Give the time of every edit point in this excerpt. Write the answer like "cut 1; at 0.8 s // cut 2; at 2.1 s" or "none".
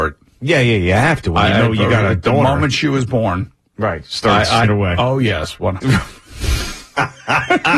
cut 1; at 4.6 s // cut 2; at 5.8 s